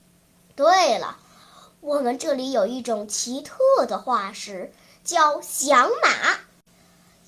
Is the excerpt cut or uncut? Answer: uncut